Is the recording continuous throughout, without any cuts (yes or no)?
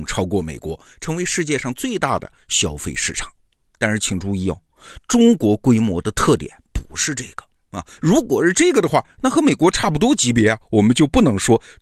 yes